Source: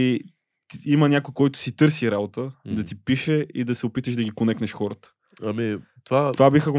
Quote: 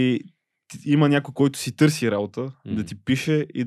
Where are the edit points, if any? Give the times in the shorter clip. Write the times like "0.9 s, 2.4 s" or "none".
none